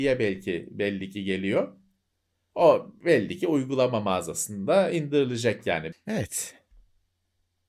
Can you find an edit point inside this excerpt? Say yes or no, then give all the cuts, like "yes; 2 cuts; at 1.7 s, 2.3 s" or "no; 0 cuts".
yes; 1 cut; at 5.9 s